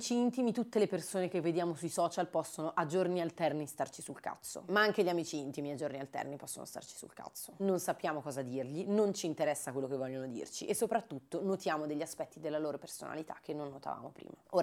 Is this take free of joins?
yes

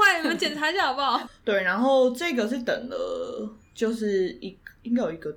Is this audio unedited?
no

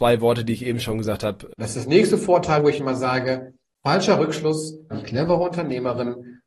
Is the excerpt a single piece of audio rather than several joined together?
no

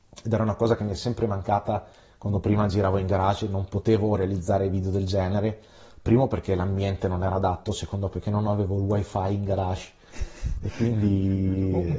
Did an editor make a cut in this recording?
no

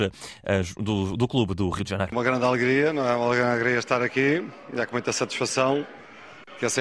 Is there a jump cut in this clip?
yes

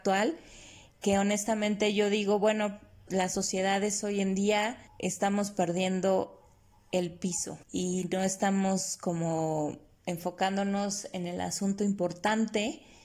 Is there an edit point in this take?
yes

